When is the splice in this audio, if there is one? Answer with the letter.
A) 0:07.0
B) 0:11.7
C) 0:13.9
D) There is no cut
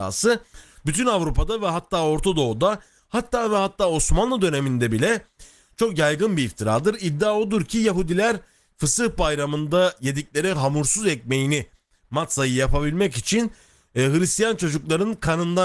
D